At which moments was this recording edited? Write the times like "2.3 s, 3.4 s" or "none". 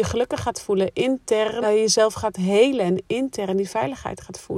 1.6 s